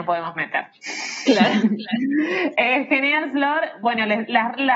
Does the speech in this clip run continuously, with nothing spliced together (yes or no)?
yes